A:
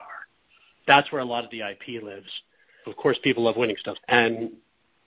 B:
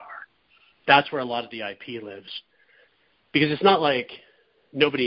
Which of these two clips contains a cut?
A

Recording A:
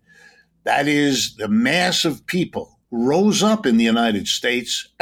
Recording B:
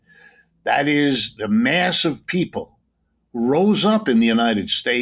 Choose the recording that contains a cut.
A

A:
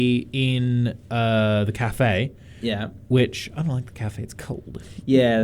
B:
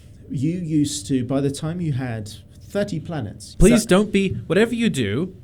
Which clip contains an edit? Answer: B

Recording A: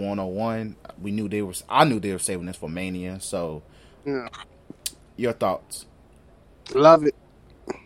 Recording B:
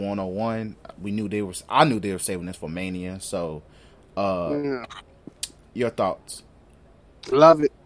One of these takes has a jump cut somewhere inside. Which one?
A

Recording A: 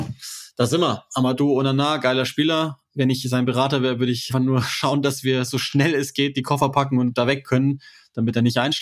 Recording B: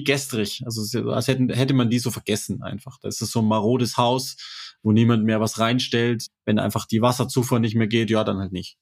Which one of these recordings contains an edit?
A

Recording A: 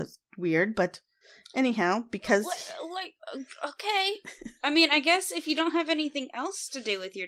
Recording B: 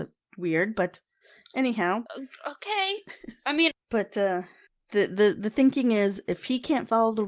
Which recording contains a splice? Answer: B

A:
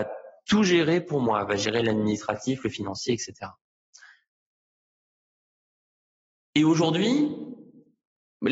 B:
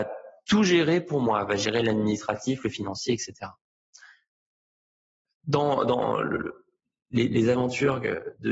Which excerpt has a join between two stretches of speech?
B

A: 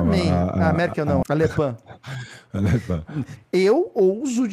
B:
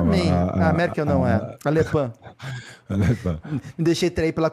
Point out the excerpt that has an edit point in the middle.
A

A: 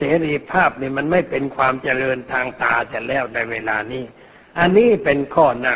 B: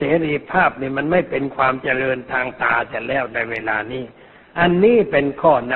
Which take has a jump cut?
A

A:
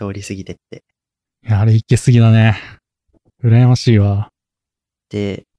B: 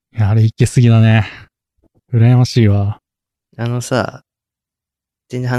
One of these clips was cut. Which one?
B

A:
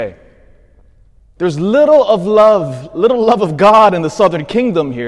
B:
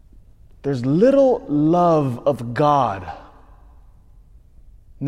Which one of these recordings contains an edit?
A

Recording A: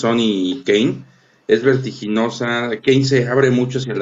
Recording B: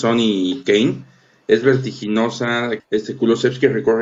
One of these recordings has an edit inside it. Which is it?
B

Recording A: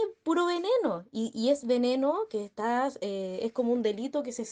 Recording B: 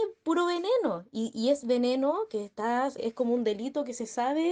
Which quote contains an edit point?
B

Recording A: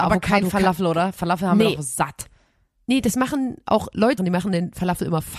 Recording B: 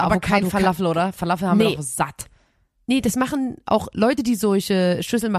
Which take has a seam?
A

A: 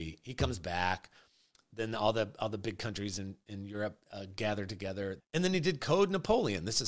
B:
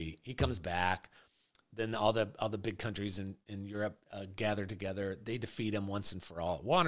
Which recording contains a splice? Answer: A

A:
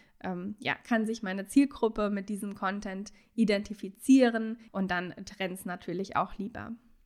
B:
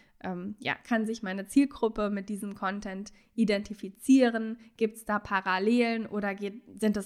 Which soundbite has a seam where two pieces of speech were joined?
A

